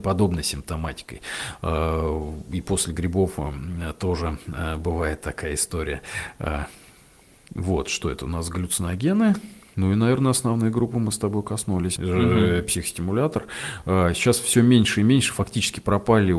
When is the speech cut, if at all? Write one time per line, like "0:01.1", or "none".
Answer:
0:12.0